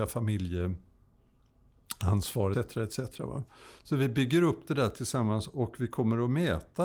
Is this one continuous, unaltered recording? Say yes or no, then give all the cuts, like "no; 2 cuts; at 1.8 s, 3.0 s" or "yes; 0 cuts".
no; 1 cut; at 2.5 s